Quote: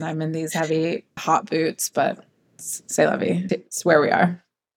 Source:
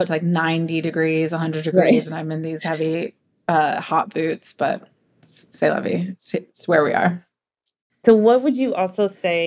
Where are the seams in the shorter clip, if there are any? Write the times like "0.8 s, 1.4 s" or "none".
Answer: 1.2 s, 3.5 s

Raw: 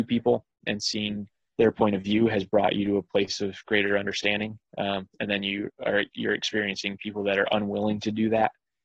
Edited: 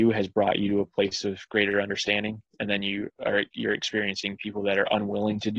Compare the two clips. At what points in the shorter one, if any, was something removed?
2.5 s

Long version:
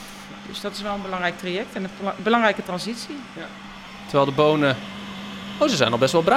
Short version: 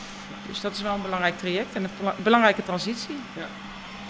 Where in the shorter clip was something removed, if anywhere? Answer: none

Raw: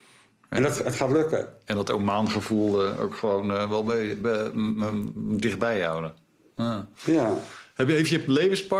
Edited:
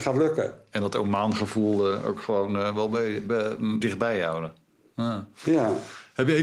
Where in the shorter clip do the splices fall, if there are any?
3.8 s

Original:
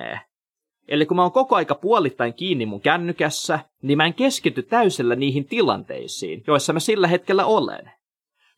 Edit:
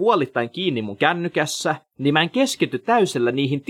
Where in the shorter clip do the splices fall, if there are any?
none

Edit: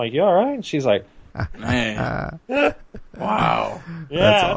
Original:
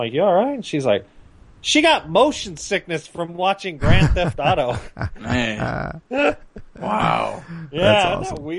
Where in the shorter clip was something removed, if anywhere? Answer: 1.3 s

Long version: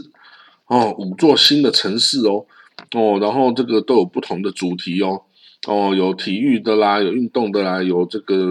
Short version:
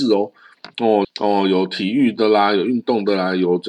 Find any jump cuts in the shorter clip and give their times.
1.0 s

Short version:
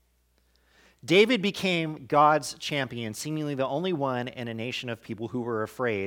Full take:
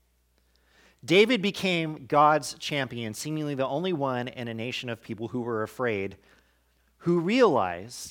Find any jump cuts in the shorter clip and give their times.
none

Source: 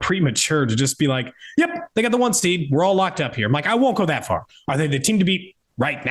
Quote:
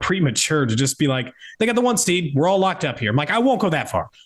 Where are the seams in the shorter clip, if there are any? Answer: 1.5 s

